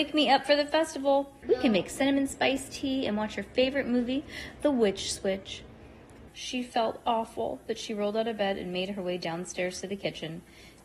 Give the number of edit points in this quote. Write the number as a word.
two